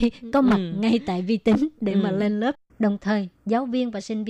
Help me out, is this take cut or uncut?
cut